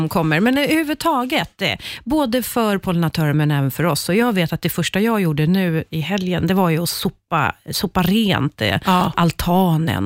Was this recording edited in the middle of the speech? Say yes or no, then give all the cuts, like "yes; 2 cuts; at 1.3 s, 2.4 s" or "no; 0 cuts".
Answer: no; 0 cuts